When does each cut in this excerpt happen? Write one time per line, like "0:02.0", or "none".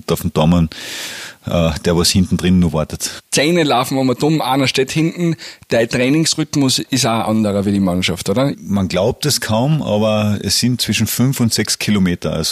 0:08.5
0:10.8